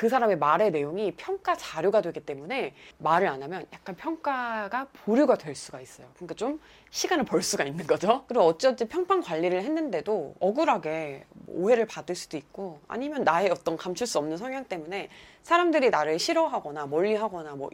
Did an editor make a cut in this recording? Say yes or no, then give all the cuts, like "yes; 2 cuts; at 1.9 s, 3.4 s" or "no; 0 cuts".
no; 0 cuts